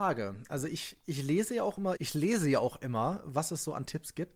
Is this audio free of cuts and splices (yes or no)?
no